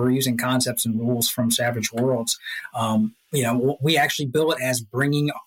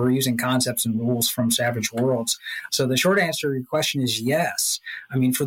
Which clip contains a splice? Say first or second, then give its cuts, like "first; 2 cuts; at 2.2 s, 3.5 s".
second; 1 cut; at 2.7 s